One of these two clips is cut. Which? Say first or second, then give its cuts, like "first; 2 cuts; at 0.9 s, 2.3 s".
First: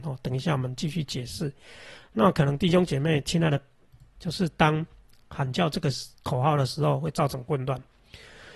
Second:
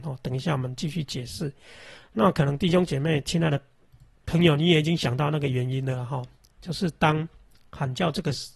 first; 1 cut; at 4.1 s